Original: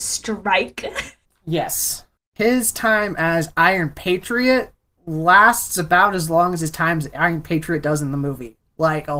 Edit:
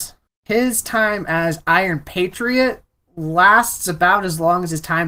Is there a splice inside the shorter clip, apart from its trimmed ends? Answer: no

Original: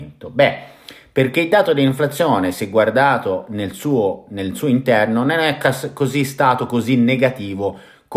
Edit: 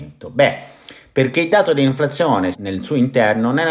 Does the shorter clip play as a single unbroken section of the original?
no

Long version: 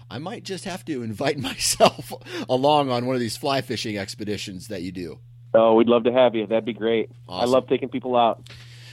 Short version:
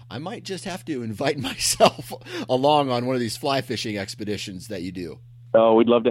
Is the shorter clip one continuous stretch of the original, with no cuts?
yes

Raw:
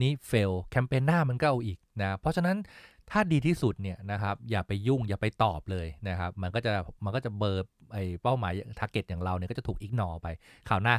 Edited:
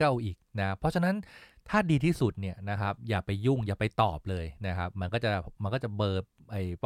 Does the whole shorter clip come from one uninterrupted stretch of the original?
yes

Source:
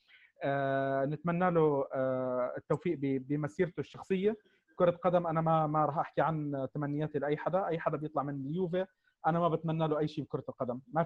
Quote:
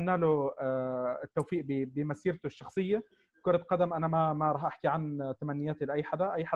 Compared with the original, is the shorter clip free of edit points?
yes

